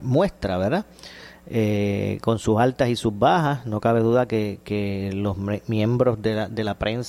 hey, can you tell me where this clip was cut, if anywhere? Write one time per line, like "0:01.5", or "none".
none